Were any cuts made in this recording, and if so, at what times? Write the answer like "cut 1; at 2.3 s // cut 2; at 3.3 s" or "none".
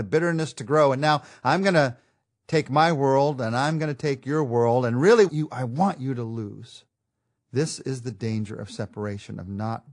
cut 1; at 5.3 s // cut 2; at 7.4 s